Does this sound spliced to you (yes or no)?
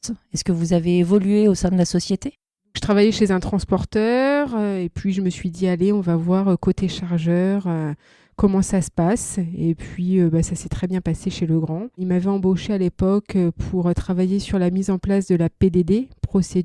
yes